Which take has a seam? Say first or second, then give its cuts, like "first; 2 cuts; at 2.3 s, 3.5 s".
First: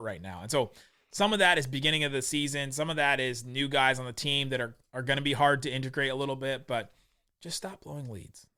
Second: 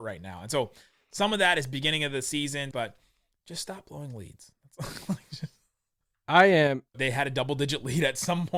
second; 2 cuts; at 2.7 s, 6.9 s